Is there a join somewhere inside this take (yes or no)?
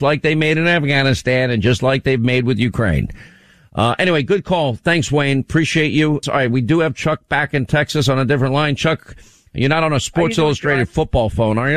yes